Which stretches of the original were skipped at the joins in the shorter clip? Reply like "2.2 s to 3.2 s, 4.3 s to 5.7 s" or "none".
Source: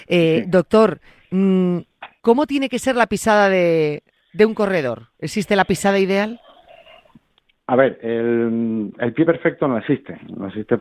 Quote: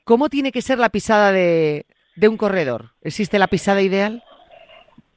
none